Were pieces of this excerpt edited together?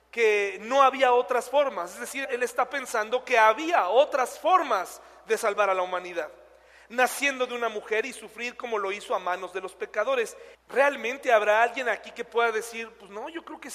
yes; 2 cuts; at 2.2 s, 10.5 s

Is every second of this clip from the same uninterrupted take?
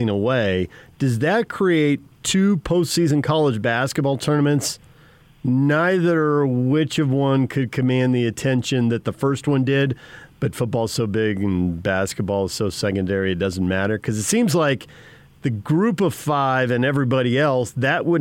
yes; 0 cuts

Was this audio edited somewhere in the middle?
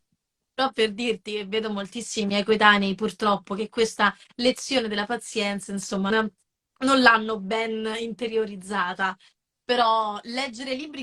yes; 1 cut; at 6.1 s

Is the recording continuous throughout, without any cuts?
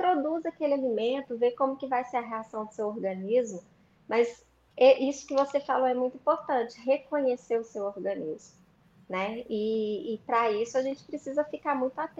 yes; 0 cuts

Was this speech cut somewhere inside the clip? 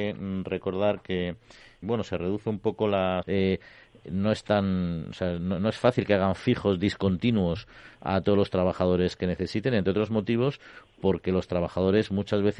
yes; 2 cuts; at 1.8 s, 3.2 s

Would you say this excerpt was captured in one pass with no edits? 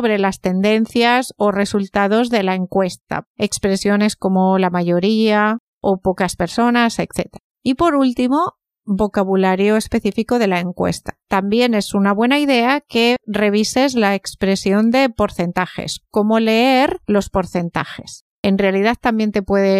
no; 3 cuts; at 7.5 s, 11.2 s, 18.3 s

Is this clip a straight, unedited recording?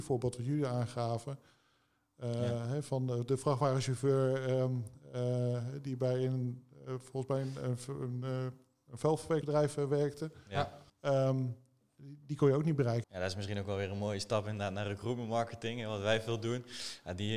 no; 3 cuts; at 9.4 s, 10.9 s, 13.0 s

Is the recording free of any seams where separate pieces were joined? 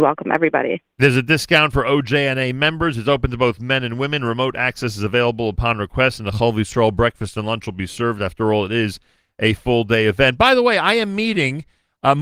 yes; 0 cuts

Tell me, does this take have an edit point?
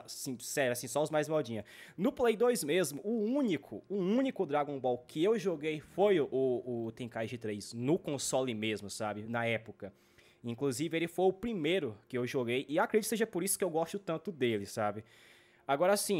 no; 0 cuts

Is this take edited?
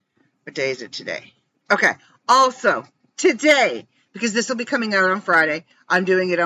no; 0 cuts

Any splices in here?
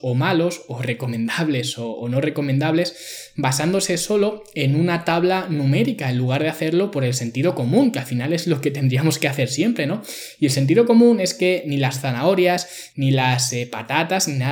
yes; 1 cut; at 12.9 s

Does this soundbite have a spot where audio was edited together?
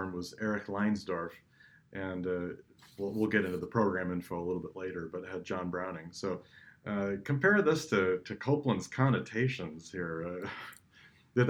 no; 0 cuts

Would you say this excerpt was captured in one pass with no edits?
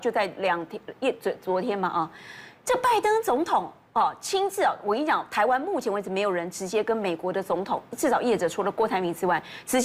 yes; 0 cuts

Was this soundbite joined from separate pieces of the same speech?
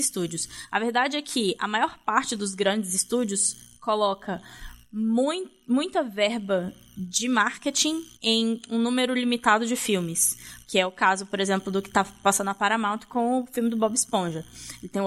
yes; 2 cuts; at 8.1 s, 10.6 s

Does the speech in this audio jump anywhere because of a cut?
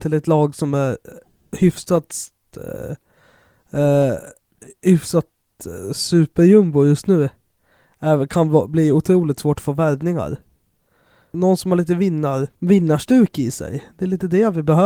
yes; 2 cuts; at 11.3 s, 12.5 s

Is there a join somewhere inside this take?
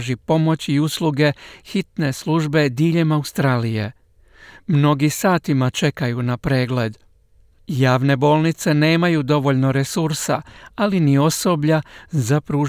no; 0 cuts

